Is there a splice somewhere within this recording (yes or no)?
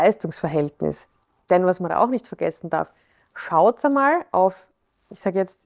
no